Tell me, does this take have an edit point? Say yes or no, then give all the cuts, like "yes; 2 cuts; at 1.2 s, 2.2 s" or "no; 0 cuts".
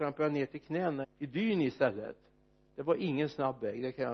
yes; 1 cut; at 1.0 s